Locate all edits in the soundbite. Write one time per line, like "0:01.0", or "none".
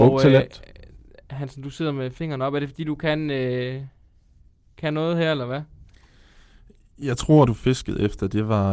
0:07.5